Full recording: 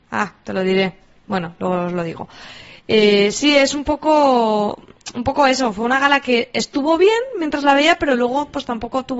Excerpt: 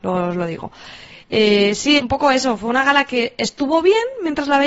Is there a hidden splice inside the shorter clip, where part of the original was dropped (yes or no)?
yes